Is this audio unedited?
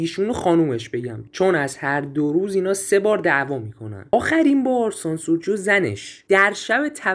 yes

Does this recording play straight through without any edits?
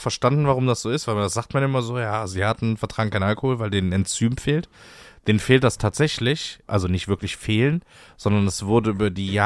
no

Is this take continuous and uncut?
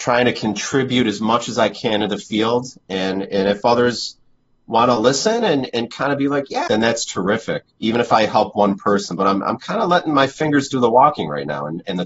no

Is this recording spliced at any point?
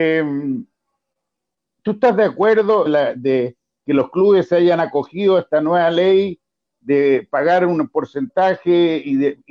yes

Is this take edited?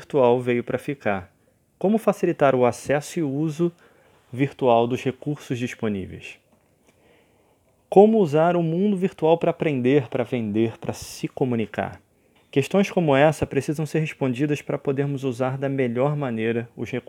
yes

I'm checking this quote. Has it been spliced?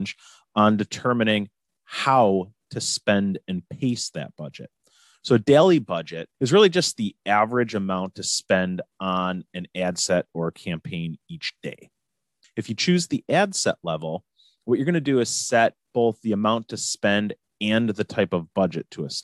yes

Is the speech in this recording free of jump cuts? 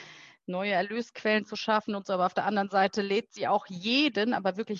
yes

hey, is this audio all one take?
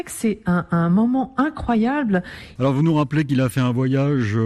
no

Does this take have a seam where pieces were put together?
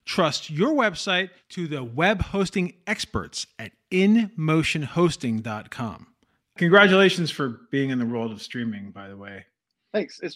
yes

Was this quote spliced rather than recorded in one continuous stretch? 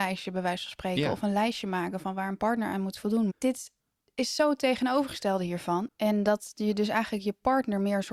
yes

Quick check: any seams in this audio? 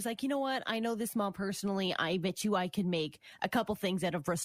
no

